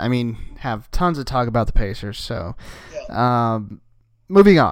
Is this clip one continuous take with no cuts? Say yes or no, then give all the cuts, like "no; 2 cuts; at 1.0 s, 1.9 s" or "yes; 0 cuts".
yes; 0 cuts